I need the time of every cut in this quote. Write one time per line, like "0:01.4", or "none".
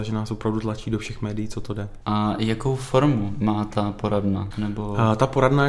0:02.0
0:04.5